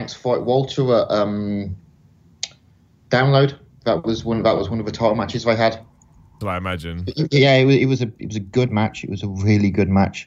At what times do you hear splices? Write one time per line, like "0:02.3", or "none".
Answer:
0:06.4